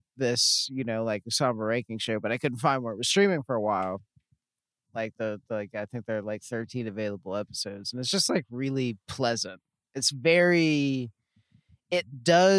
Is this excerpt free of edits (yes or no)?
no